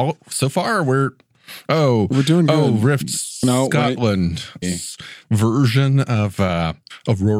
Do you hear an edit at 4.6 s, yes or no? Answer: yes